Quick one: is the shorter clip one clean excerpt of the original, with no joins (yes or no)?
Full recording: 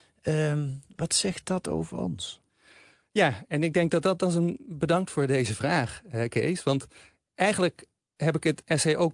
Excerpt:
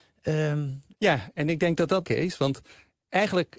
no